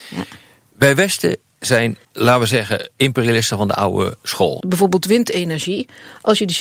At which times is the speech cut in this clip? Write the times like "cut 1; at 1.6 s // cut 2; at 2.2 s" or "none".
cut 1; at 2.0 s // cut 2; at 4.6 s

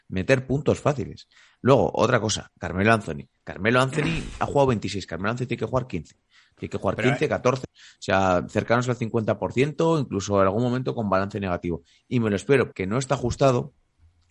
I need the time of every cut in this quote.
cut 1; at 7.6 s // cut 2; at 12.7 s

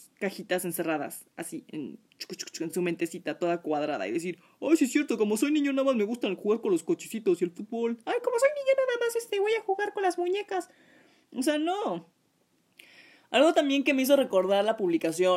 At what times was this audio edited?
none

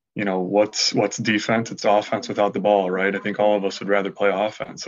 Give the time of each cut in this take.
none

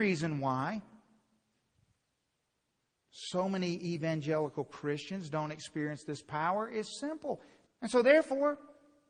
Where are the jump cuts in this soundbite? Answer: cut 1; at 7.7 s

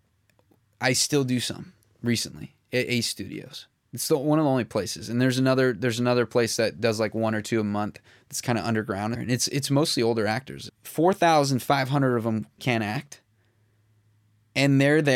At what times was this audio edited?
cut 1; at 9.1 s // cut 2; at 10.7 s // cut 3; at 12.6 s

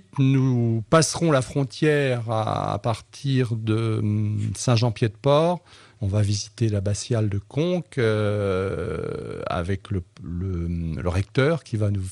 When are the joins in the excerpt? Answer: cut 1; at 6.0 s

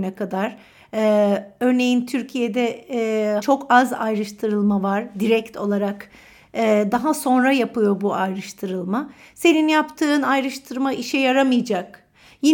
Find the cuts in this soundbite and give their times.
cut 1; at 3.4 s

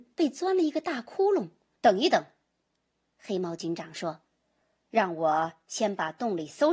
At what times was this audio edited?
cut 1; at 1.8 s

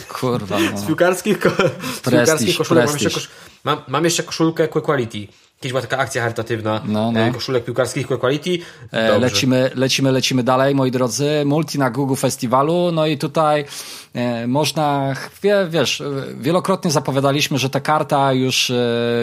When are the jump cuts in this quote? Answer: cut 1; at 8.9 s

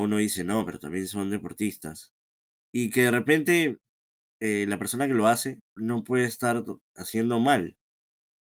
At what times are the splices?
cut 1; at 2.5 s // cut 2; at 5.6 s

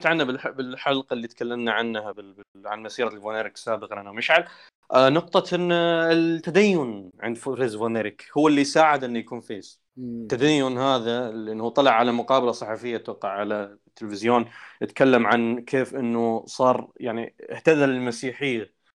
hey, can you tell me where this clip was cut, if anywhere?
cut 1; at 9.9 s

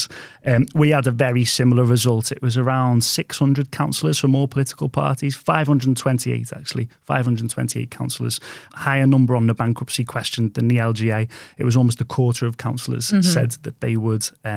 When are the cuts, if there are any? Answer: cut 1; at 8.7 s

